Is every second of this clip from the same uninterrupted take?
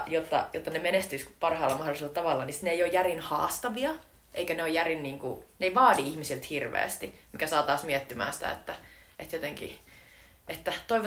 yes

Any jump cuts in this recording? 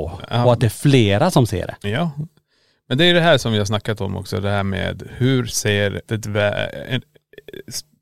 yes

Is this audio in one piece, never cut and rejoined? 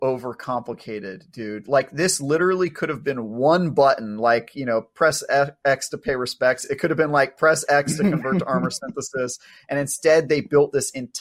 yes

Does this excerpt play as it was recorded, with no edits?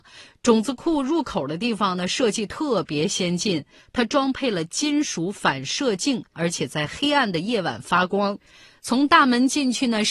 no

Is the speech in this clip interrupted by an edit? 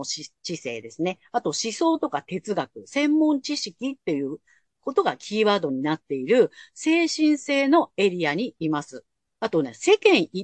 yes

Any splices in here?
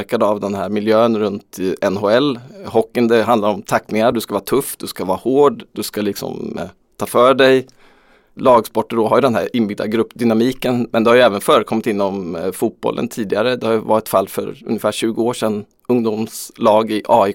no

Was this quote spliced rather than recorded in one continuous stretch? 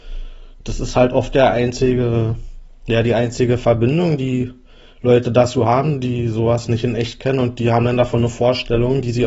no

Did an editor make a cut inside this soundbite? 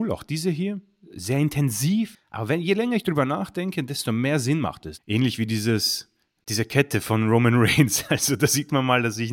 yes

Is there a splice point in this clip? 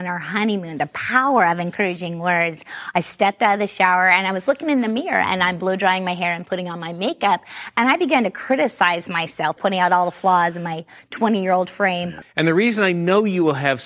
yes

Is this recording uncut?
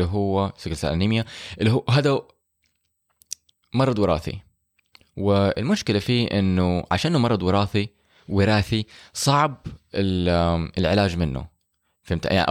yes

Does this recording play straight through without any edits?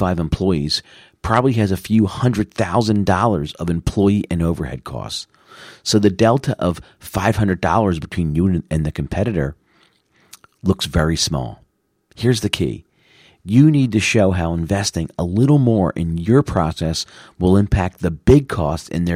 yes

